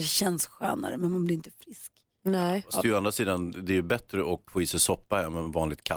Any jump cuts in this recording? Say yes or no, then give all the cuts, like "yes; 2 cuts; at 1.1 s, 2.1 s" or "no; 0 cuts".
no; 0 cuts